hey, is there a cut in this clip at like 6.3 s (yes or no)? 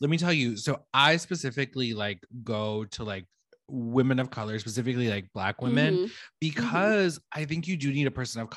no